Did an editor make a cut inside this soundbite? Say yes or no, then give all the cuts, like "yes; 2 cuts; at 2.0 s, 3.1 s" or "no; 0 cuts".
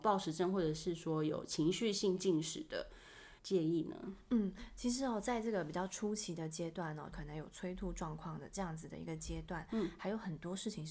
yes; 2 cuts; at 3.4 s, 7.1 s